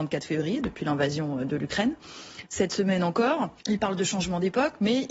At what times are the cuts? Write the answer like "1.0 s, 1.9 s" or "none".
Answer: 2.5 s, 3.6 s